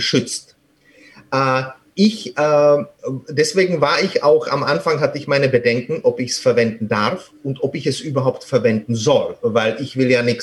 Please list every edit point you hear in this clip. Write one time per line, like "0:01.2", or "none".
none